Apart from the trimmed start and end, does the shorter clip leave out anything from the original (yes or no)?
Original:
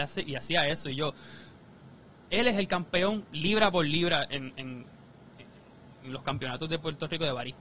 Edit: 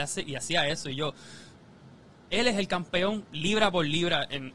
no